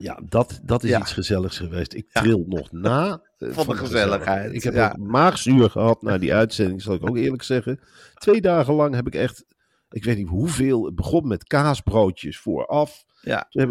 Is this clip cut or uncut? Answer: uncut